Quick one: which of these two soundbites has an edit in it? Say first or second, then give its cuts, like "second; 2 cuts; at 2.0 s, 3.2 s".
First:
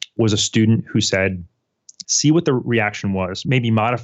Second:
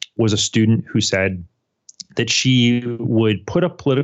first; 1 cut; at 2.0 s